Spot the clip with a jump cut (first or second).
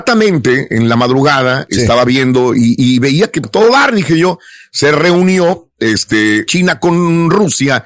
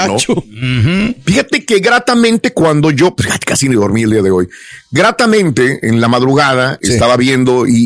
first